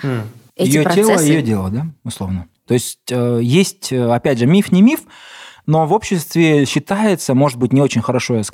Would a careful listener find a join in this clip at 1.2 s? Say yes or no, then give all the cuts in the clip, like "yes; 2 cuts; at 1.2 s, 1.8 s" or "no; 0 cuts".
no; 1 cut; at 2.6 s